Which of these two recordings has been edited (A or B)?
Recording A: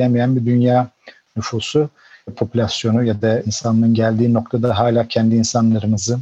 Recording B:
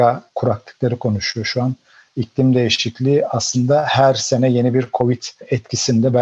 B